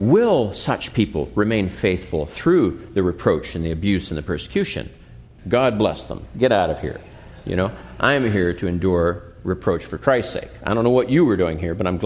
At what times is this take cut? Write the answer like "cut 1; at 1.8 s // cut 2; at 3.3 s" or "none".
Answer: cut 1; at 5.4 s

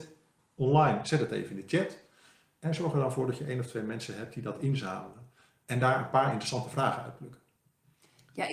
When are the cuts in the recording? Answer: none

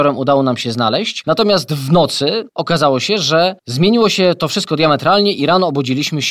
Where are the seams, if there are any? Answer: cut 1; at 1.2 s // cut 2; at 3.6 s

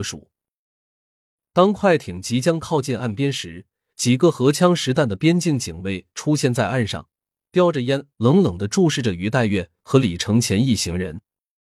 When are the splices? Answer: none

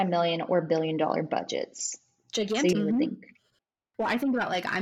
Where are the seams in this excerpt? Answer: cut 1; at 2.7 s

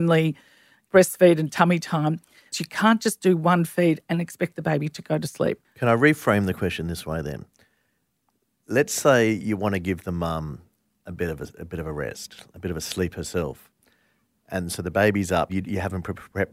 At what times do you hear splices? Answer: cut 1; at 2.5 s // cut 2; at 15.5 s

